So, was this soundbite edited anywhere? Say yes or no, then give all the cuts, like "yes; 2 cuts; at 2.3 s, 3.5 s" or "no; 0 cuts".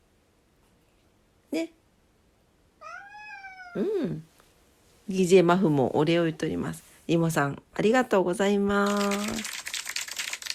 no; 0 cuts